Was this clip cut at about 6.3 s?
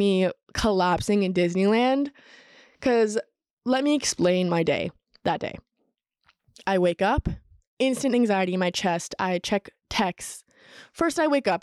no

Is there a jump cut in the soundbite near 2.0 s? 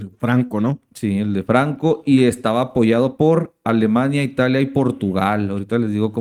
no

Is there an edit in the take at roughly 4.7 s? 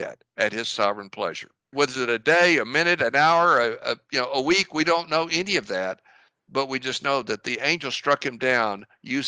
no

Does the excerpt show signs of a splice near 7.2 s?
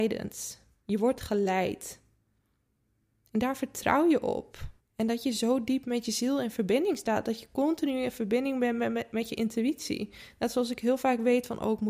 no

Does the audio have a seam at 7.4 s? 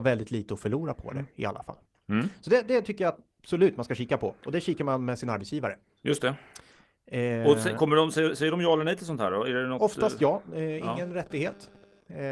no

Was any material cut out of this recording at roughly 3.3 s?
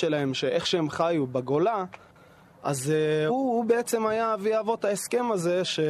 yes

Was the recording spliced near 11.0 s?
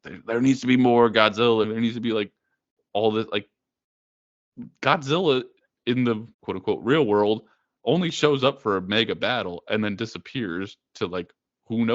no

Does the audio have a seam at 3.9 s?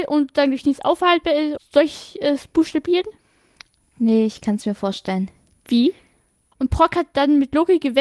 no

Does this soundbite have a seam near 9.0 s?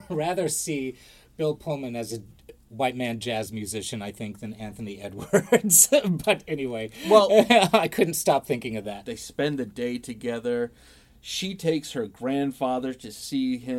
yes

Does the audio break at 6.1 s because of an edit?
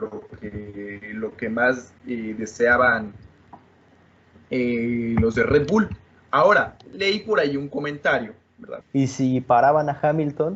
no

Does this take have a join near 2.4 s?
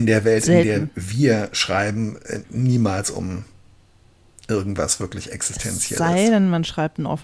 yes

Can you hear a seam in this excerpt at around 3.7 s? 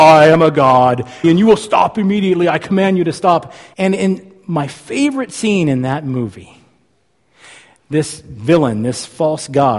yes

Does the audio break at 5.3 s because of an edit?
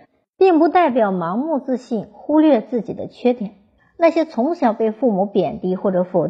no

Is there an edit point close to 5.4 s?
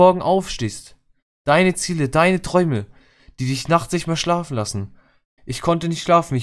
yes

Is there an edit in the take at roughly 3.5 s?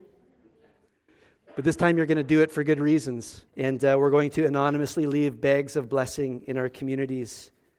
yes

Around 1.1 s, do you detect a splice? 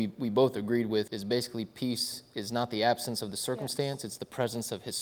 yes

